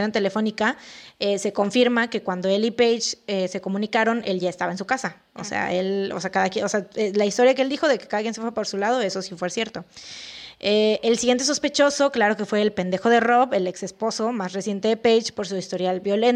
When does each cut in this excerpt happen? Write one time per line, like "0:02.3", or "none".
none